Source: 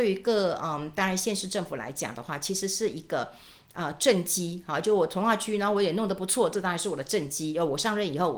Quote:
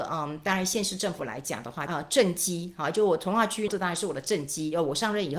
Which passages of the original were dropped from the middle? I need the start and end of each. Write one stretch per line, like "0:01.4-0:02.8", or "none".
0:02.4-0:03.8
0:05.6-0:06.5